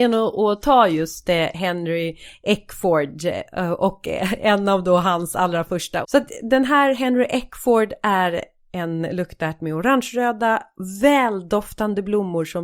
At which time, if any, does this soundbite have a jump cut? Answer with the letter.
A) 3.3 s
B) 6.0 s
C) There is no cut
B